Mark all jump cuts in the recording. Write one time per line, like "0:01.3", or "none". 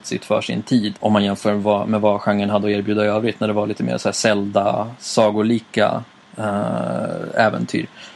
0:01.0